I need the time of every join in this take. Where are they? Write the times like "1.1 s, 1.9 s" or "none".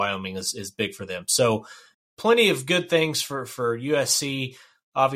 1.9 s